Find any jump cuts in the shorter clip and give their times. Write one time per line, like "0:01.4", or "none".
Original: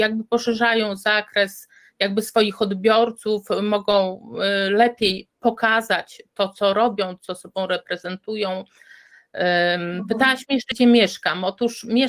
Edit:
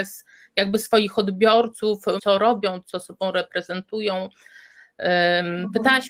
0:02.2